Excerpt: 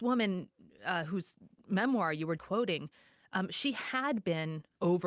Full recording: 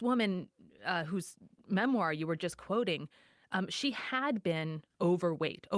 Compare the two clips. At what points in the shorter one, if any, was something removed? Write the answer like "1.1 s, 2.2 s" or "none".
2.4 s